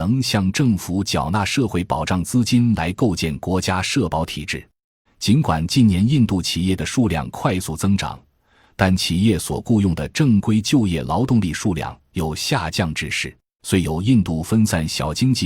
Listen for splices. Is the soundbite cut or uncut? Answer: cut